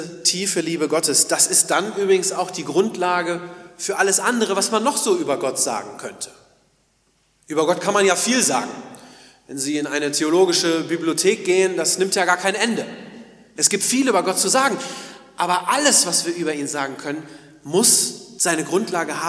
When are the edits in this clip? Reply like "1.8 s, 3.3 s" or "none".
13.6 s